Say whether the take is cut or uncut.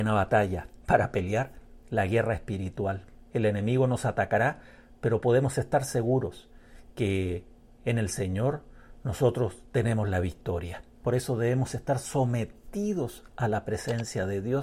cut